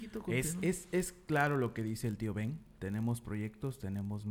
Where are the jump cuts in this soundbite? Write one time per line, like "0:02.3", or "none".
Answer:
none